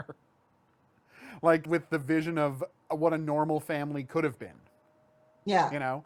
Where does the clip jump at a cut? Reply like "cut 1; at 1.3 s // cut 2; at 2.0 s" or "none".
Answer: cut 1; at 1.7 s